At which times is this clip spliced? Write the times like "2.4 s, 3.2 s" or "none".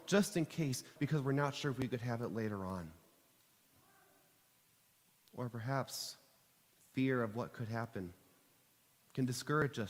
1.0 s